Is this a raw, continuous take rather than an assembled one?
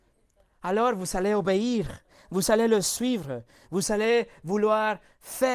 yes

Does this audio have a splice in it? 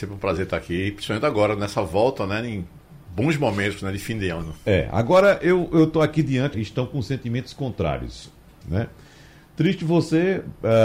yes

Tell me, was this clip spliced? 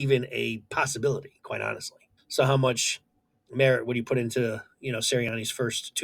yes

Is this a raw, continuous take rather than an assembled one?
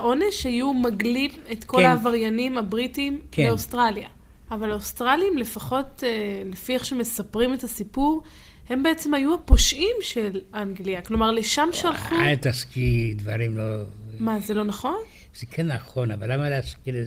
no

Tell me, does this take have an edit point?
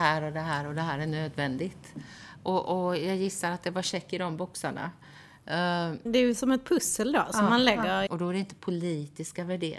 yes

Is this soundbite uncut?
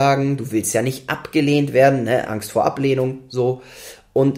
yes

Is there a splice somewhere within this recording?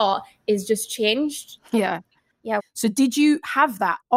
yes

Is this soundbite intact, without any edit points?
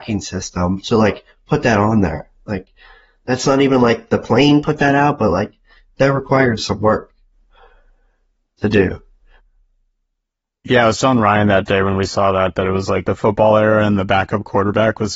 yes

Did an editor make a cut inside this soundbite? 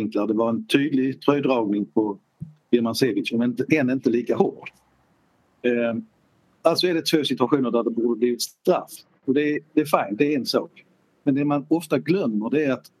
no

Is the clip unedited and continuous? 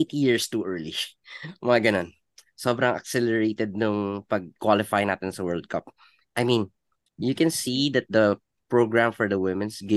yes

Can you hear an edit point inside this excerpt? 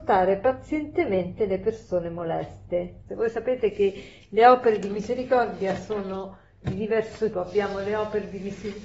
yes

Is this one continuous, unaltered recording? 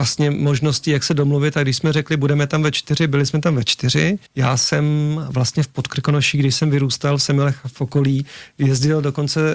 no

